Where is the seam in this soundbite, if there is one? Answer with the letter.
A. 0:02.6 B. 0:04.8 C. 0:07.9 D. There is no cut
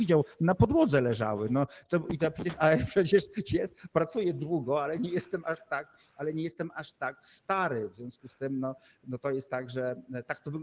D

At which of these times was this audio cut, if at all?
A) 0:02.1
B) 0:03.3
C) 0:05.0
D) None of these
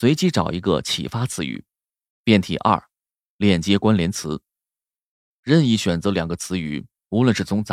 A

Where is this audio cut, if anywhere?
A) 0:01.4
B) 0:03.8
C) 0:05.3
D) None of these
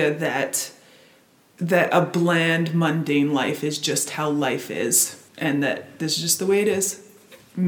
C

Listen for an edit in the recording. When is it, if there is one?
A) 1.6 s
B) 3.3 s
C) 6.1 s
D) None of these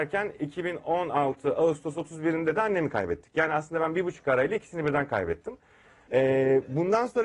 C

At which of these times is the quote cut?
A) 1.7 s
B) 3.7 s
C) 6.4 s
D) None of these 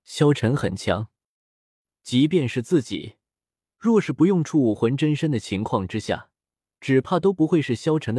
D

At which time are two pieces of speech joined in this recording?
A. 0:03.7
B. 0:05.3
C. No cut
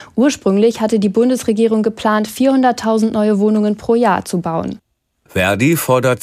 B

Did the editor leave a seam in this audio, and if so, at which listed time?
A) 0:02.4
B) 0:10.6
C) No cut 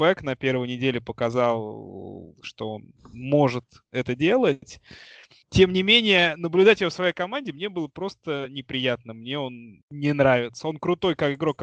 C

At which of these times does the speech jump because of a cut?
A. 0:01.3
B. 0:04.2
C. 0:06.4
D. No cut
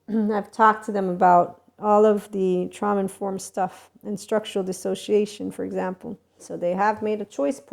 C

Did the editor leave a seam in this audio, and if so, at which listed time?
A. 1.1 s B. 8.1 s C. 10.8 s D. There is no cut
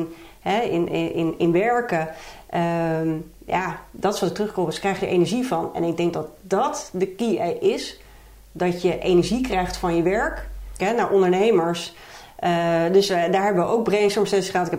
C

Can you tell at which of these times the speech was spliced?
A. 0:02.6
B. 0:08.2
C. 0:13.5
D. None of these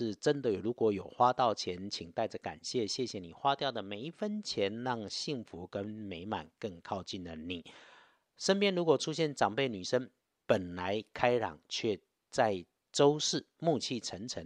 D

